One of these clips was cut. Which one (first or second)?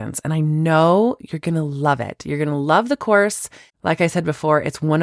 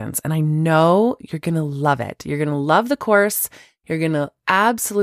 first